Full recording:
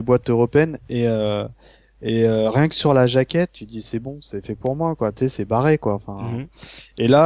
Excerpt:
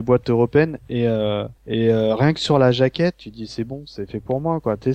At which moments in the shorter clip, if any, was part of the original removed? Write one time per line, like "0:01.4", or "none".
0:01.6